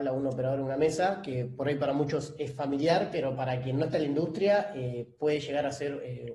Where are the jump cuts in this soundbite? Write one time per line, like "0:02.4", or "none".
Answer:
none